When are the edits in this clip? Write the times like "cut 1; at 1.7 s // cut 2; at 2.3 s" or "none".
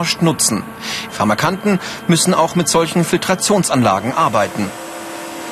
cut 1; at 1.1 s